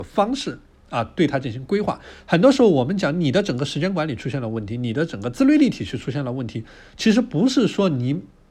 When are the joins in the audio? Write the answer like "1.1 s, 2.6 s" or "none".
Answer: none